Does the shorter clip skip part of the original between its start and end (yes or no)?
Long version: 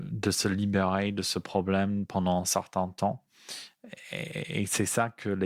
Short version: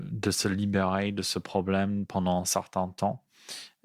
no